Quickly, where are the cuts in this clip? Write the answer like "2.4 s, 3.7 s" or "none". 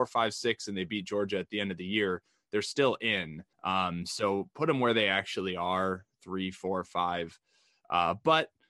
3.5 s

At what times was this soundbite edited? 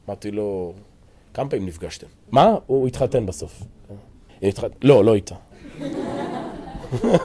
2.3 s, 4.3 s

